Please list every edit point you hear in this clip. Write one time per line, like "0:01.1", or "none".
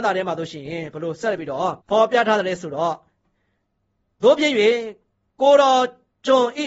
0:01.8

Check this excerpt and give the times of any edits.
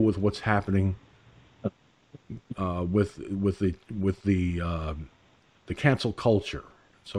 none

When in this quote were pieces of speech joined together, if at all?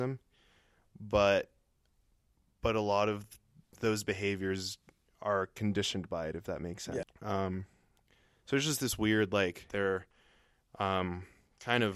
0:07.0
0:09.7

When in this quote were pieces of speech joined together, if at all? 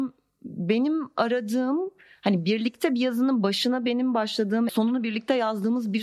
0:04.7

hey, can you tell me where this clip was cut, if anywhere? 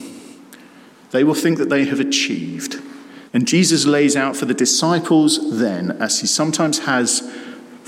0:03.3

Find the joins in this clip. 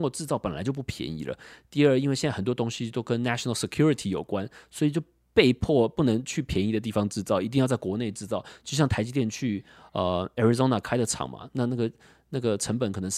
none

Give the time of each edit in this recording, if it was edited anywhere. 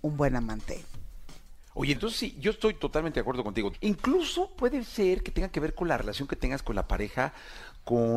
0:01.9
0:03.7

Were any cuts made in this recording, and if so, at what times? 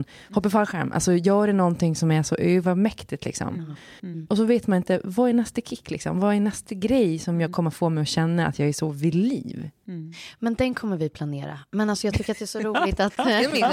0:04.0

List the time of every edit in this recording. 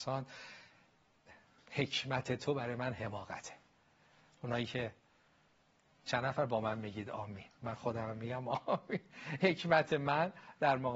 none

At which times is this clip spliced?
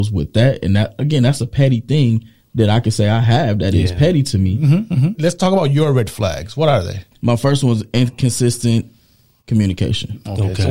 0:05.1
0:07.1

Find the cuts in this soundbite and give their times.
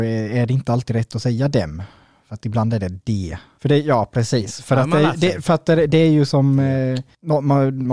0:03.6

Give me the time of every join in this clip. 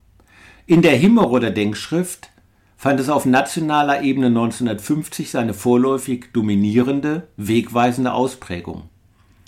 none

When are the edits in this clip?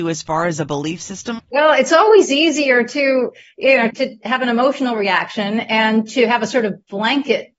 0:01.4
0:03.9

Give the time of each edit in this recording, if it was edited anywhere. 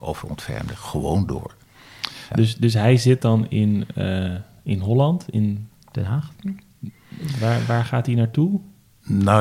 0:02.3

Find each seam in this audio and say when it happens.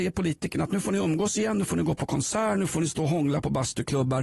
none

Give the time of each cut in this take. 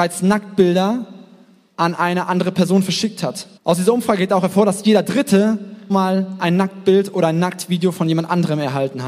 0:03.6
0:05.9

